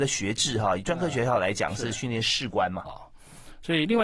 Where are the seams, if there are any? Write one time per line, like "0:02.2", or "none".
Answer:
0:02.8

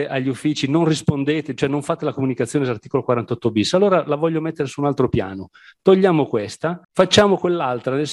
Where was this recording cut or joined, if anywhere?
0:06.8

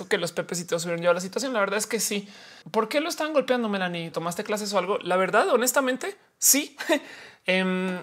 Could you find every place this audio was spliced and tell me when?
0:02.6
0:04.1

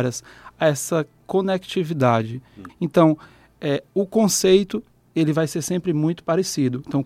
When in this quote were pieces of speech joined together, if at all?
0:02.7

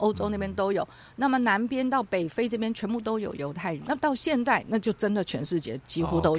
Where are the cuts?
0:03.8

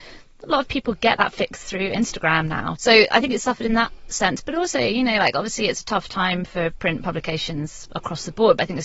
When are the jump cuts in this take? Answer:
0:02.8

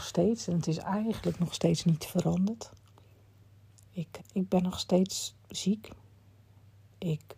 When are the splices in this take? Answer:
0:04.2
0:05.4

